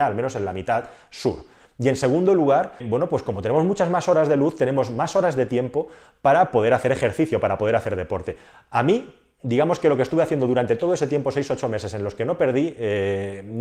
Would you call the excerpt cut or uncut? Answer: cut